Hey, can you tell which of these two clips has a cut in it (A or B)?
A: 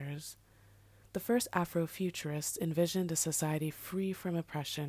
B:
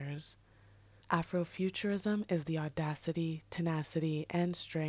B